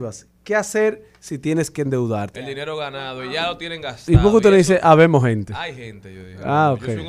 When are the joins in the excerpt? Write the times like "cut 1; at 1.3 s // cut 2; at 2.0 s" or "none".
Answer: cut 1; at 2.3 s